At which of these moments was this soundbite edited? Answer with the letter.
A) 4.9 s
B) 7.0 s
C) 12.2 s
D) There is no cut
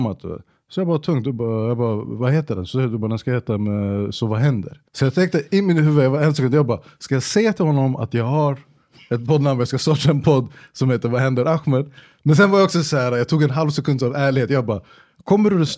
A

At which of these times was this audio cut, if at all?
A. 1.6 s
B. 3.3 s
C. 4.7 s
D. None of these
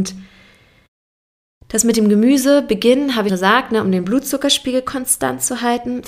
B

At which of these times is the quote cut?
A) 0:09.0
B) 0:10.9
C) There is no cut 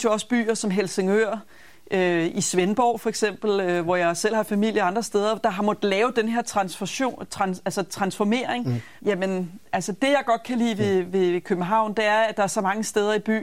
A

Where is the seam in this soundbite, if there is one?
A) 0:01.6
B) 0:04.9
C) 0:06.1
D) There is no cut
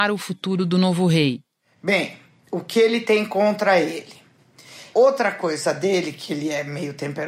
B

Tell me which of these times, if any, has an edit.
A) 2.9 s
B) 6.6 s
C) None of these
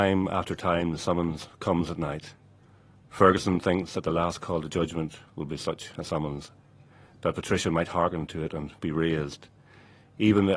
C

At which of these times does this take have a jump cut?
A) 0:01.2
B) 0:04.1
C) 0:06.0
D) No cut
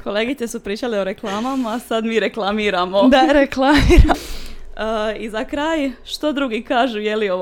B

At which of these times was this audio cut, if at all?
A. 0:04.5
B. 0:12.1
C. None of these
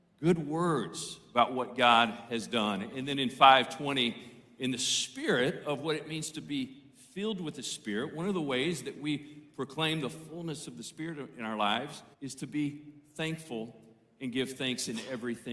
B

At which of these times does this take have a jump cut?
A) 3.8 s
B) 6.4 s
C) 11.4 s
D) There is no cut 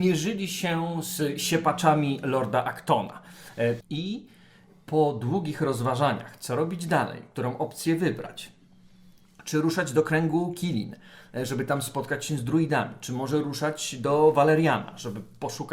A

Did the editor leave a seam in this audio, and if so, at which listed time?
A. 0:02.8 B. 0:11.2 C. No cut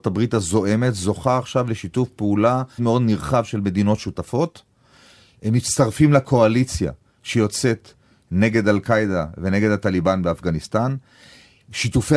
A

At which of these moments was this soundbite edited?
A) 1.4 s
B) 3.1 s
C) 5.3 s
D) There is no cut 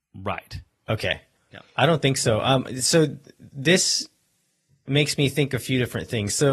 A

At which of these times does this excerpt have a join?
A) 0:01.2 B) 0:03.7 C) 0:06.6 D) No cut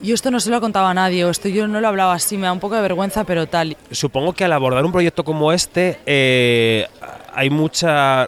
B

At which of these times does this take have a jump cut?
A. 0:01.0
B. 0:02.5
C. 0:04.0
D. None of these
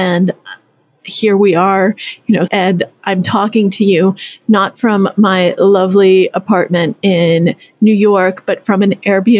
B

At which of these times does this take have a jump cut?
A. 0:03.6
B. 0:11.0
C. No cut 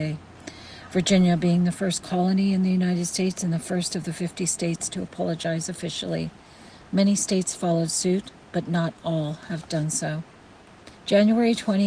B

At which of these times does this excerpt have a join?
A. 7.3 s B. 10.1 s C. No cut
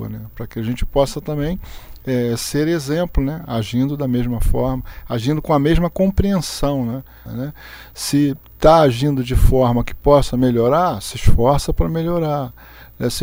A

